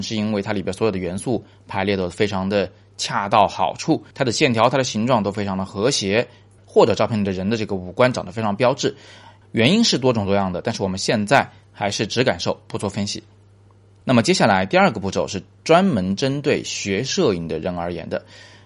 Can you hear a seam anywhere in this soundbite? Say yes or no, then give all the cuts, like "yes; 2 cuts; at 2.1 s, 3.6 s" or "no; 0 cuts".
yes; 1 cut; at 4.1 s